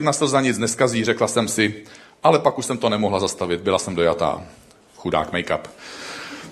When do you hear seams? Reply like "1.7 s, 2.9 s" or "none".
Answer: none